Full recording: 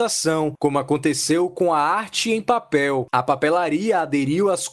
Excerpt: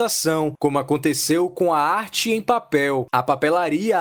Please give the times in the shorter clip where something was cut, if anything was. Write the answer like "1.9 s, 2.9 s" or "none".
none